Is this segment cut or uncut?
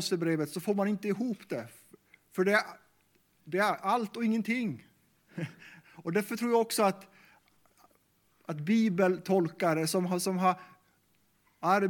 cut